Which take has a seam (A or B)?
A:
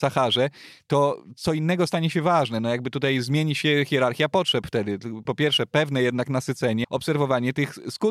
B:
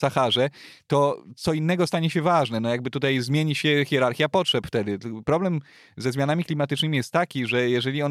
A